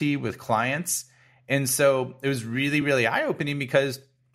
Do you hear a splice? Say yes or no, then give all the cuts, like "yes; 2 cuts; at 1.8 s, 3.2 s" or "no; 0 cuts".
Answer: no; 0 cuts